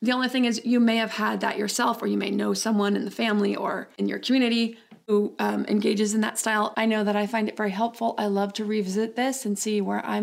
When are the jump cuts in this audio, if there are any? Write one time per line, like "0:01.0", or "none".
0:06.7